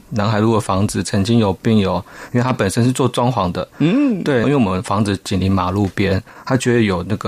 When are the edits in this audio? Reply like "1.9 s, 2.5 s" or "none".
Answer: 4.4 s